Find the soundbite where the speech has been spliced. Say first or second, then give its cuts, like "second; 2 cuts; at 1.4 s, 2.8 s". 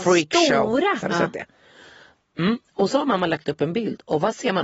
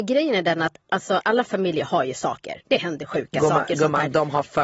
first; 1 cut; at 1.0 s